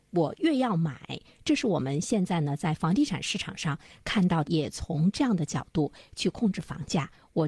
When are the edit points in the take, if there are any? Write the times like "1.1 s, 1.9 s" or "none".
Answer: 4.4 s